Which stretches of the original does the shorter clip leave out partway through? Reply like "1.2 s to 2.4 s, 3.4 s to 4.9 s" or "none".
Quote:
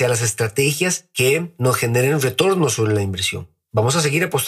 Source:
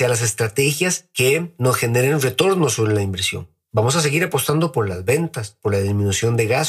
none